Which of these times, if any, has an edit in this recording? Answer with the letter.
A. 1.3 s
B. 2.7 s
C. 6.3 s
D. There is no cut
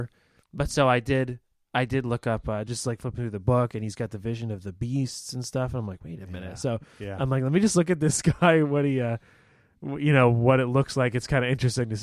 B